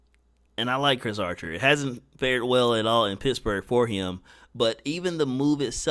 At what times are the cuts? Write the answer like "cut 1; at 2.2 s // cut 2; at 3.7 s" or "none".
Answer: none